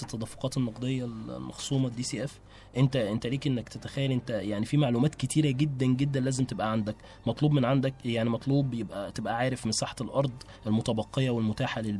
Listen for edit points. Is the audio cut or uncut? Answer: uncut